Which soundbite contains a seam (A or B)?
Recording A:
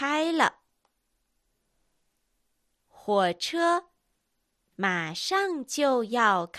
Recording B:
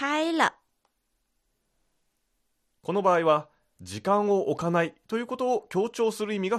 B